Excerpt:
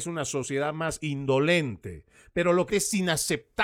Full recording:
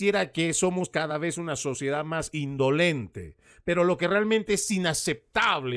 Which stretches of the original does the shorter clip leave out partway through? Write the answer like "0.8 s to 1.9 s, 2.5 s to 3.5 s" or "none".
4.0 s to 4.5 s

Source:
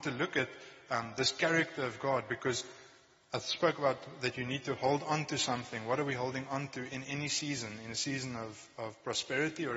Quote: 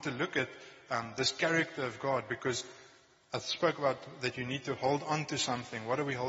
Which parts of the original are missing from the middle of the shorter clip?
none

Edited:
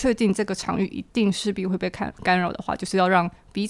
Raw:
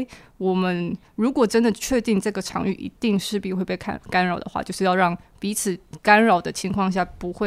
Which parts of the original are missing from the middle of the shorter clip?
none

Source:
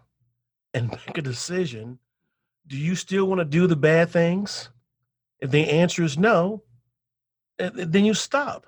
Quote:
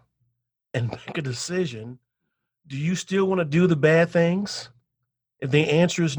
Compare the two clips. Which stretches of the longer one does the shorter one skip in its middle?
none

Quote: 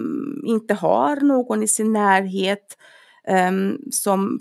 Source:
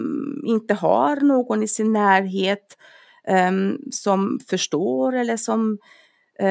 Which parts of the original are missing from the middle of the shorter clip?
none

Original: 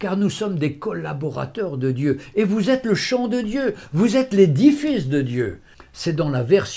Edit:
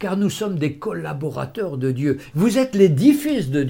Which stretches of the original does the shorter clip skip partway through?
2.3 s to 3.9 s

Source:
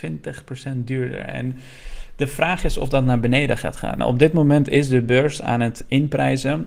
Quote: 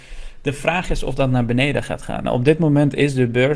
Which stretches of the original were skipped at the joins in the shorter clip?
none

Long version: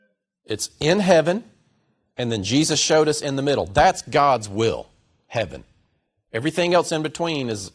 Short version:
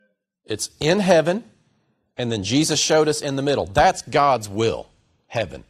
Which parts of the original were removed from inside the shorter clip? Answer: none

